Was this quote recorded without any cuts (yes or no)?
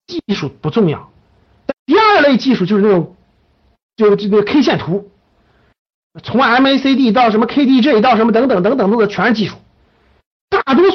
no